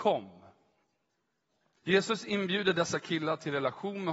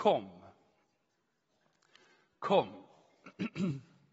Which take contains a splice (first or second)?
first